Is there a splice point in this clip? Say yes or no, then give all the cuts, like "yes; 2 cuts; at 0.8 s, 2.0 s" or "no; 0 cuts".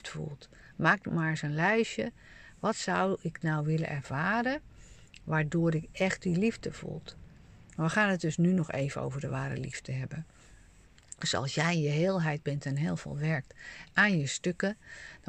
yes; 1 cut; at 7.7 s